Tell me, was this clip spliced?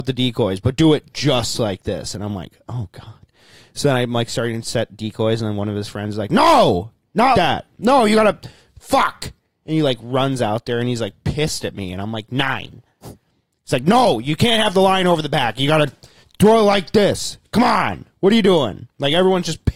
yes; 1 cut; at 7.3 s

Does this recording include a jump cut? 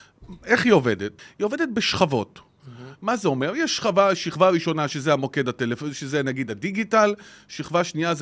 no; 0 cuts

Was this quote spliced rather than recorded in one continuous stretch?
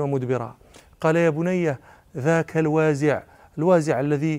no; 0 cuts

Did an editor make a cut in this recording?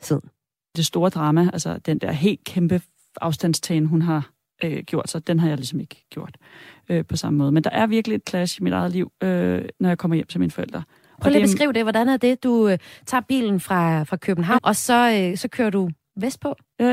yes; 1 cut; at 14.6 s

